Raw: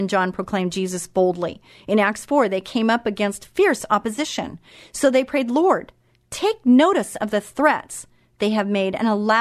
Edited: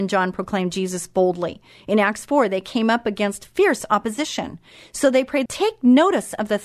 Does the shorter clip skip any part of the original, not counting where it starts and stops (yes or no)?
yes